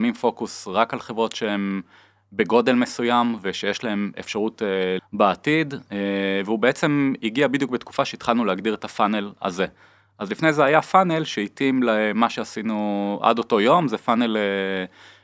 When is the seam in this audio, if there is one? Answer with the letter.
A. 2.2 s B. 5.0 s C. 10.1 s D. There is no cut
B